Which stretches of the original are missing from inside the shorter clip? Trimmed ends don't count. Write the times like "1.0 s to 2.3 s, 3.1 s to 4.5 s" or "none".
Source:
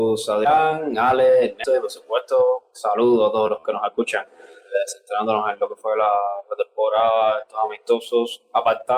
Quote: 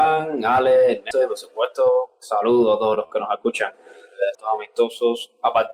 4.9 s to 7.4 s